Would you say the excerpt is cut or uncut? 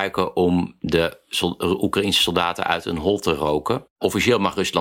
uncut